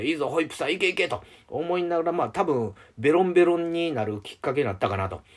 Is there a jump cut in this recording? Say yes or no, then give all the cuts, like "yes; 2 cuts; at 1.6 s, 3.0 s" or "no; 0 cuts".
no; 0 cuts